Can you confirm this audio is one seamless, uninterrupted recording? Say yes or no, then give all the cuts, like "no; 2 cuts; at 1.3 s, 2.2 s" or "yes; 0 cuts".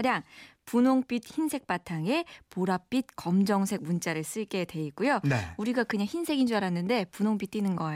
yes; 0 cuts